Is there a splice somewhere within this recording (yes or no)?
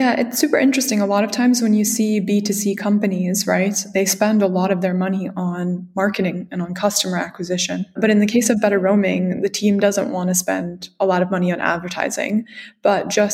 no